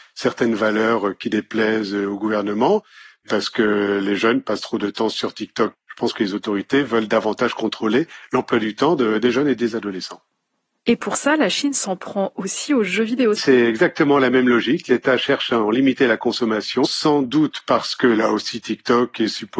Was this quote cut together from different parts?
yes; 2 cuts; at 13.4 s, 16.8 s

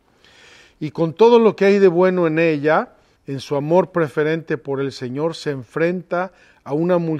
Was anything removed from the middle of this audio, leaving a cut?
yes; 1 cut; at 3.2 s

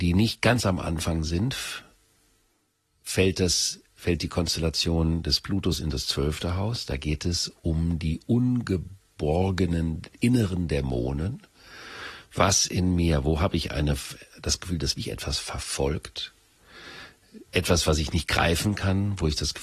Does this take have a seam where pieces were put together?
no; 0 cuts

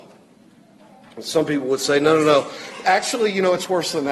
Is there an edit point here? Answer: no; 0 cuts

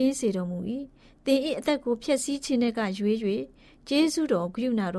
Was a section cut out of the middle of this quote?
no; 0 cuts

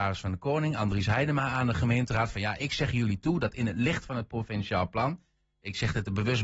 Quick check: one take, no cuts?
yes; 0 cuts

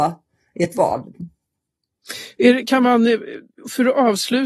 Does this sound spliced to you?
no; 0 cuts

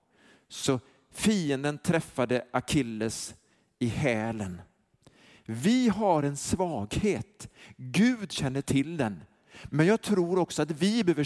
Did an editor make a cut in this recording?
no; 0 cuts

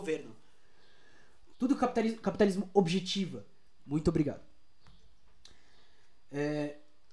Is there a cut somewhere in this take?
yes; 2 cuts; at 1.5 s, 3.8 s

